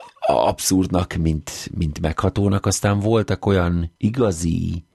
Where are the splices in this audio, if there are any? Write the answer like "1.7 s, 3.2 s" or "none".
4.0 s